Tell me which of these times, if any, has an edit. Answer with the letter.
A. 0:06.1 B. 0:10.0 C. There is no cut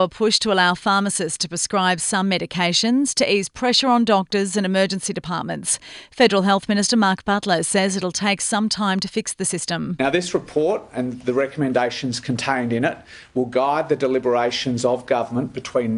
C